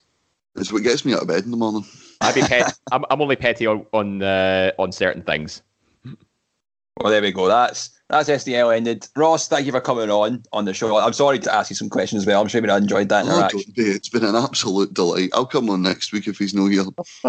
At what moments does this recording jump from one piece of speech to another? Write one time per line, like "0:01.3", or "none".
0:11.4